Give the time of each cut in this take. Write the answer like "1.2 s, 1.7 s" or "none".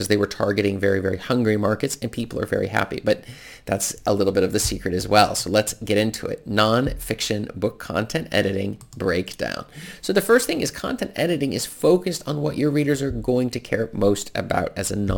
none